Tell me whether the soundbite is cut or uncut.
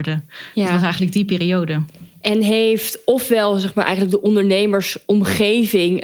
uncut